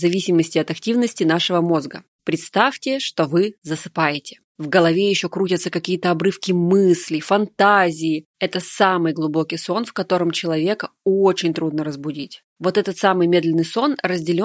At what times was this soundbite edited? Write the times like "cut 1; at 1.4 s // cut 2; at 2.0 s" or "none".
cut 1; at 8.3 s

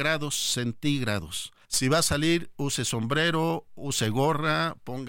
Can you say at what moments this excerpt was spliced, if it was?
cut 1; at 1.6 s

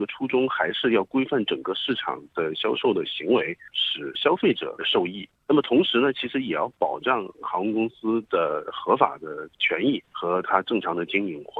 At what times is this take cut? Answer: cut 1; at 3.7 s

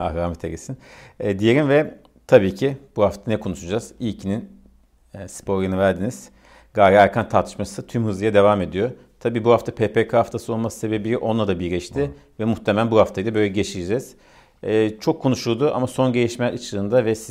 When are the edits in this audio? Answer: none

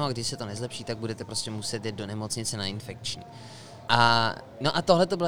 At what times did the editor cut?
cut 1; at 3.9 s

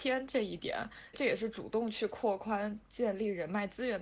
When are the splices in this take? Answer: cut 1; at 1.1 s

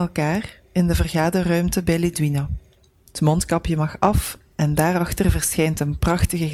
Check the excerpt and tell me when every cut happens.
cut 1; at 3.0 s

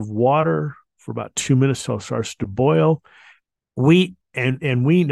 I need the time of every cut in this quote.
cut 1; at 3.6 s

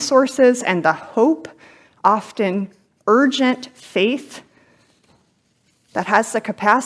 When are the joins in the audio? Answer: none

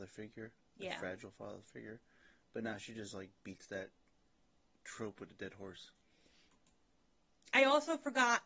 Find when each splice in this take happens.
none

